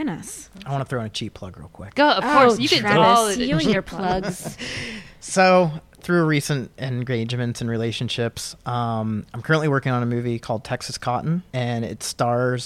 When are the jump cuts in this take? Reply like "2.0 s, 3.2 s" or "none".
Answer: 11.5 s